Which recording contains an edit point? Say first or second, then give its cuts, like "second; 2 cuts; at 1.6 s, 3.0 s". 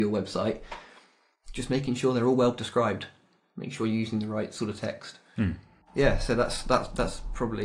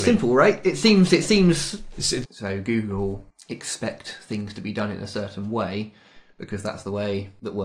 second; 1 cut; at 2.2 s